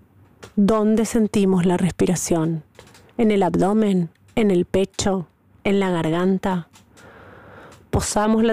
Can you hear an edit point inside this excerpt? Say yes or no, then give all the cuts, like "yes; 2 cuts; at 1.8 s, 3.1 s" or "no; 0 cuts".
no; 0 cuts